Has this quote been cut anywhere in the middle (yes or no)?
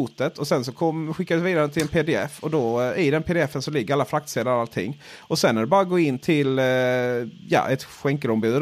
no